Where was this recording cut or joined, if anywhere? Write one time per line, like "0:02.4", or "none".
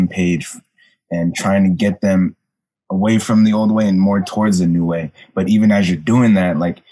none